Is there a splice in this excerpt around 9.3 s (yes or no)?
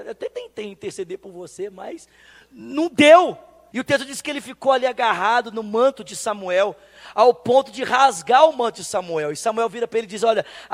no